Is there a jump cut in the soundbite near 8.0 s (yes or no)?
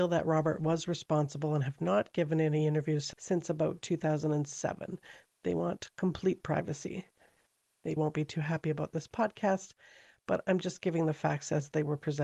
yes